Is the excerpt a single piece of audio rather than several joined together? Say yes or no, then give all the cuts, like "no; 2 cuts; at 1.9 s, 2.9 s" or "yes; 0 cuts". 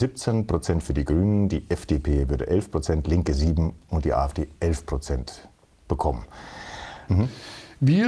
no; 1 cut; at 7.1 s